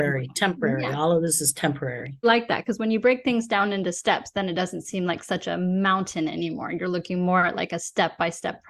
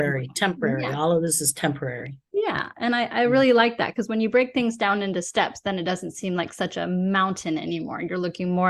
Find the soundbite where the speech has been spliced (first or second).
first